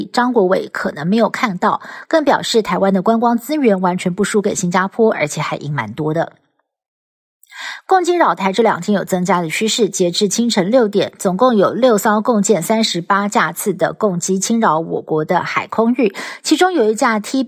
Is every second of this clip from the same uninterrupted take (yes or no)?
yes